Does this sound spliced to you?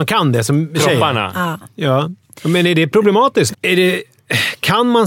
yes; 1 cut; at 3.5 s

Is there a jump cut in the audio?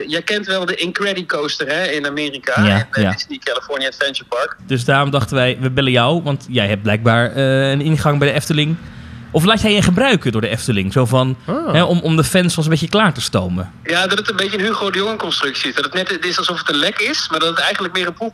yes; 1 cut; at 4.6 s

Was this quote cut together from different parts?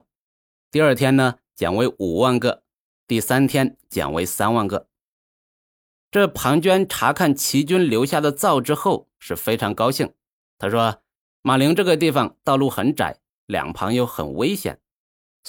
yes; 1 cut; at 11.2 s

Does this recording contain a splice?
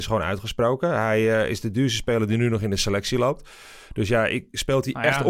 no; 0 cuts

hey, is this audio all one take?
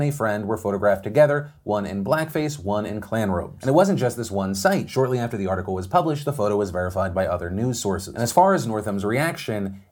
yes; 0 cuts

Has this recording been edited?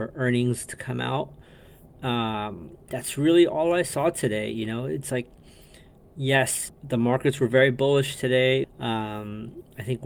yes; 2 cuts; at 6.7 s, 8.6 s

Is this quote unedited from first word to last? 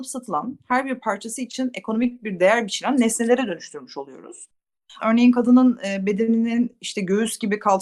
no; 1 cut; at 5.0 s

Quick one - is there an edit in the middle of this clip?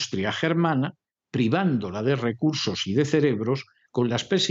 no; 0 cuts

